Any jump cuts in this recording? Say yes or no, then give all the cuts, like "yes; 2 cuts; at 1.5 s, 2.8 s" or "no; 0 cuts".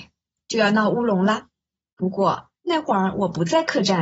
yes; 1 cut; at 1.9 s